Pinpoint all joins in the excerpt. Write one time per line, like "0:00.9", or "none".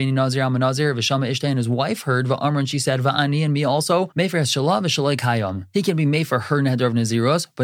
none